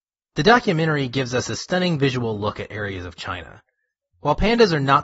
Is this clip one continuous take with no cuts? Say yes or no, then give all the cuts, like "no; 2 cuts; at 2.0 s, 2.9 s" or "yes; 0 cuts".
no; 1 cut; at 4.1 s